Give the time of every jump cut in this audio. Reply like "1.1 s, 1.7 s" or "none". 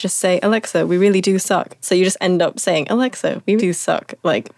1.8 s, 3.6 s